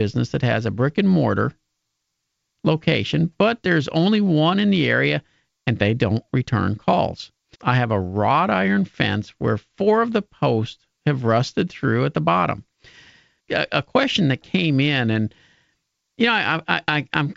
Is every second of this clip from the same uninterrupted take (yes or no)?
no